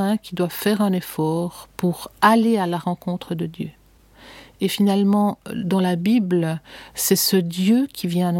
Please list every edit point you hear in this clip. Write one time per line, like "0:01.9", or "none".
0:06.9

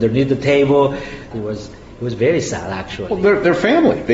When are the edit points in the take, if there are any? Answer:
0:01.3

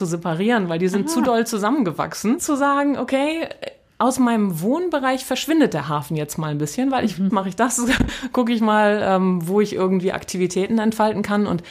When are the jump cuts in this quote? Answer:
0:02.4
0:07.3

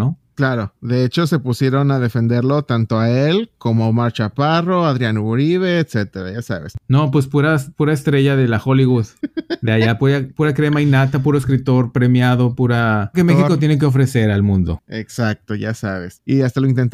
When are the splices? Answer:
0:10.0
0:13.1

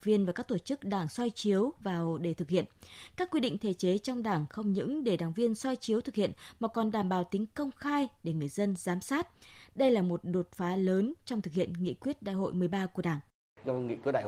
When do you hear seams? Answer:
none

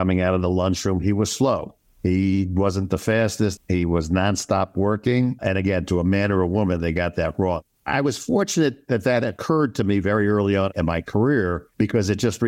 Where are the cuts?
0:03.6

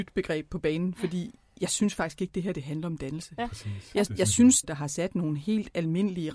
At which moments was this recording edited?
0:03.4
0:04.6

